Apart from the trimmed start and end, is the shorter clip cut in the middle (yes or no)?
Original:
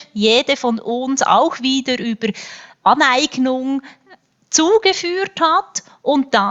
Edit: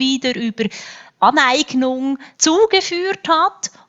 yes